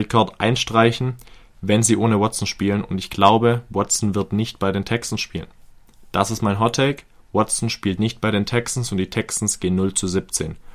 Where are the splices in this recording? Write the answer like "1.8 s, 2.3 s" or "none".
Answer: none

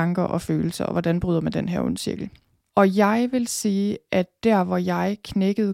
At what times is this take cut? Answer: 2.7 s

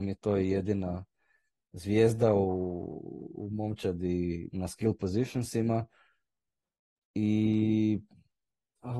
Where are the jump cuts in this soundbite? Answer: none

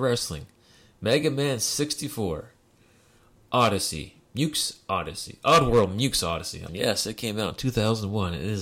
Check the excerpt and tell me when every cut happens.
6.7 s

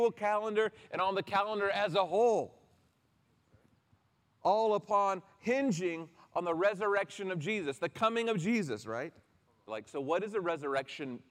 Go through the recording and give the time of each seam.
9.7 s

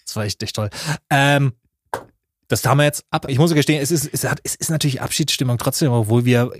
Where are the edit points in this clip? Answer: 3.3 s

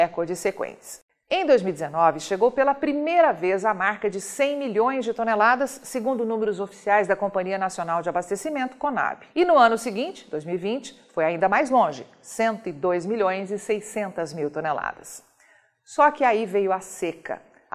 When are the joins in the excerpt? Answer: 9.3 s

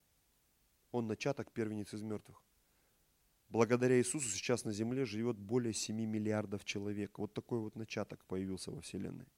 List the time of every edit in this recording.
none

